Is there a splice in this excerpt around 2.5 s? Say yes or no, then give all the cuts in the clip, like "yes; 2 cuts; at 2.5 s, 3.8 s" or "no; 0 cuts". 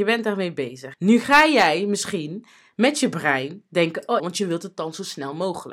no; 2 cuts; at 0.9 s, 4.2 s